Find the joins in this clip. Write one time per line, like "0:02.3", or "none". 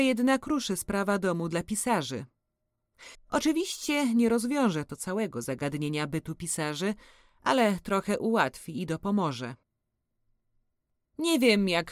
0:03.1